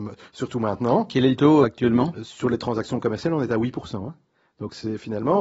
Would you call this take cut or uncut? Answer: cut